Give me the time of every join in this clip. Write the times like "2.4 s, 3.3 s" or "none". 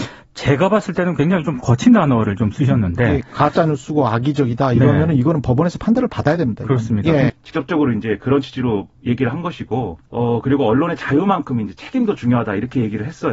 7.3 s, 10.1 s

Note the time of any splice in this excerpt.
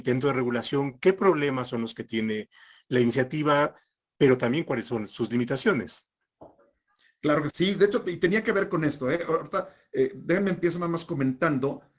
7.5 s

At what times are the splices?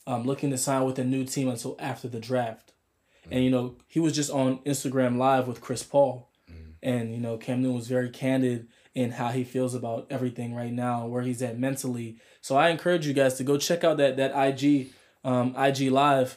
none

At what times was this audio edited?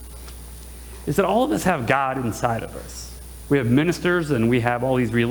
3.5 s

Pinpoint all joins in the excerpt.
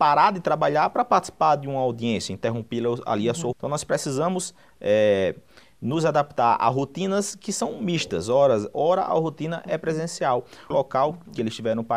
3.5 s, 8.7 s, 10.7 s

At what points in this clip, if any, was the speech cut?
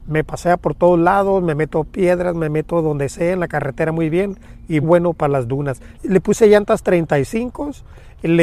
4.8 s, 5.9 s

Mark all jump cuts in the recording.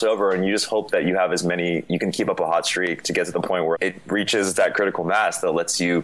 3.7 s

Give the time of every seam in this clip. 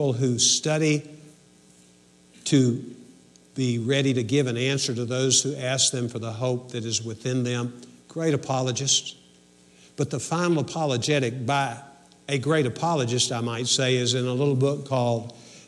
none

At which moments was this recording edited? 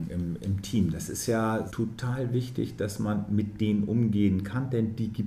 1.7 s

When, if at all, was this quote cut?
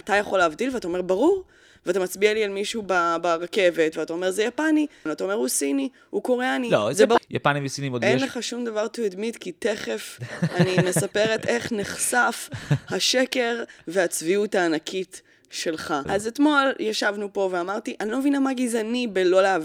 5.1 s, 7.2 s, 16.1 s

